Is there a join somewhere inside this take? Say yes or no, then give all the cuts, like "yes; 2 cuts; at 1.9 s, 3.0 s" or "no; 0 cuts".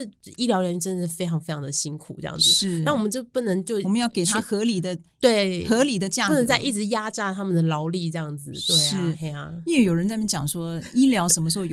no; 0 cuts